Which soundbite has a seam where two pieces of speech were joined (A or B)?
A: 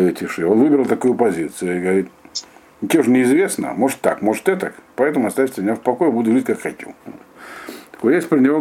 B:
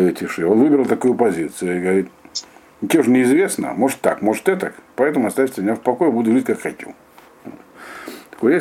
A